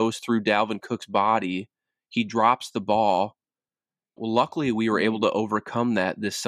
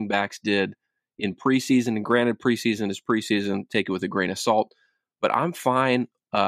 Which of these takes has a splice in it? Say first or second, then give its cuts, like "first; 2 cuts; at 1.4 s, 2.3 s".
first; 1 cut; at 4.2 s